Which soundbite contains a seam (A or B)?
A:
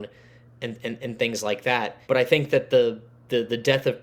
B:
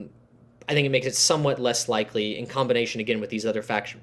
A